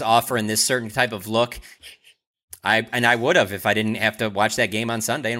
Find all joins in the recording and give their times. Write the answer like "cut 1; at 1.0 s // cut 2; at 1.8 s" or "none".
cut 1; at 1.8 s

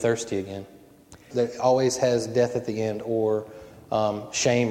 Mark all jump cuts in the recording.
cut 1; at 1.3 s

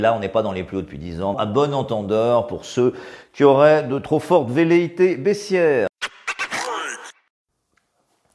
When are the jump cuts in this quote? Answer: cut 1; at 1.3 s

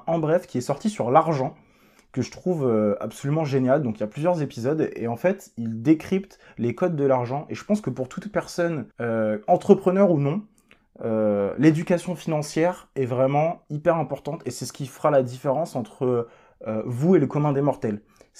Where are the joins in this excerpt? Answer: cut 1; at 8.9 s

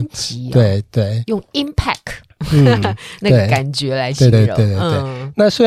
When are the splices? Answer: none

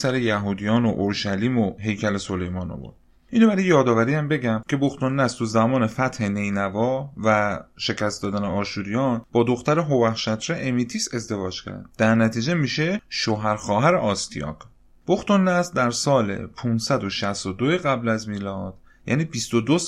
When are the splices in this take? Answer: cut 1; at 11.9 s

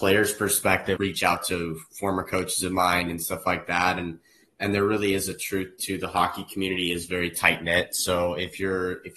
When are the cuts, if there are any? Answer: cut 1; at 1.0 s

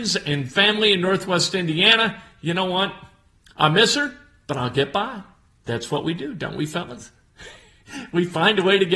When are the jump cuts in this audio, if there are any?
none

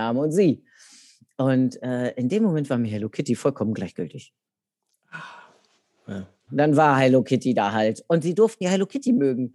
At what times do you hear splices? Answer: cut 1; at 6.5 s

